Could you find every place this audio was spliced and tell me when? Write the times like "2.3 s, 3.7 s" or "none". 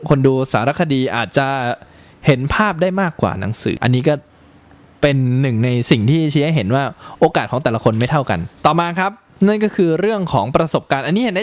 3.8 s, 8.6 s